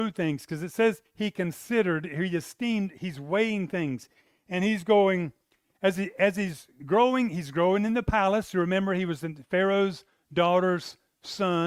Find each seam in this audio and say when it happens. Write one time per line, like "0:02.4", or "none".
none